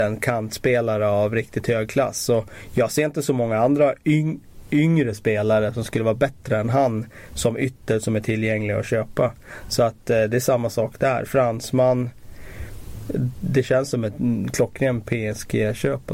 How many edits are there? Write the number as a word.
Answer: zero